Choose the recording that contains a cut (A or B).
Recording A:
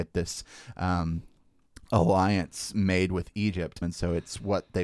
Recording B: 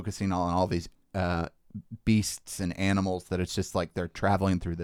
A